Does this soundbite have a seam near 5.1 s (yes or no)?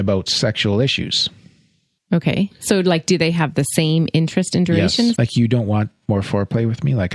yes